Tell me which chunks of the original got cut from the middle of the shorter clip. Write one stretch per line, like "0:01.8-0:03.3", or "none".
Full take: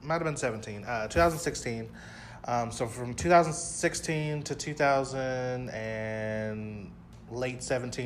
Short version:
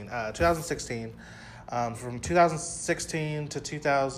0:02.7-0:02.9